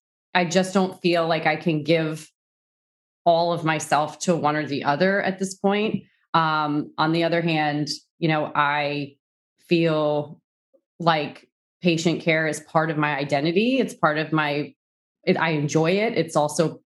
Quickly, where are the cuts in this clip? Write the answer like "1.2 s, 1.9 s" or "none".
none